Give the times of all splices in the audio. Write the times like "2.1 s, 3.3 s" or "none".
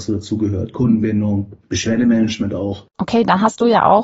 2.9 s